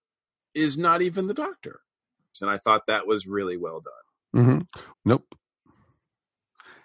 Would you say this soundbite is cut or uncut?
cut